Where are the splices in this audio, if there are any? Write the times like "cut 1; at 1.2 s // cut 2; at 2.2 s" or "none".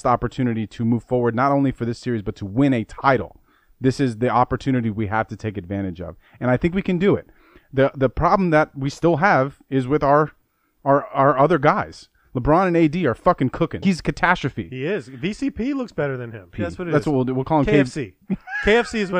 cut 1; at 13.8 s // cut 2; at 16.5 s